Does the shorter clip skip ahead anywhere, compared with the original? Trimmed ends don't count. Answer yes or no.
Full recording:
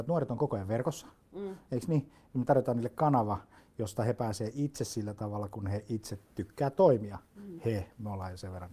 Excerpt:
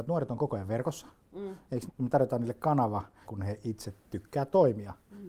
yes